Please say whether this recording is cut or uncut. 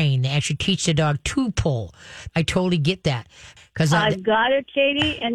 cut